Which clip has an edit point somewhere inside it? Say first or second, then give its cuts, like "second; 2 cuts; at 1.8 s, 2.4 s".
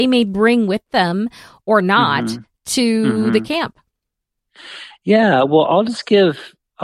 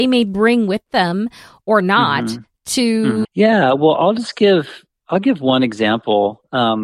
second; 1 cut; at 3.2 s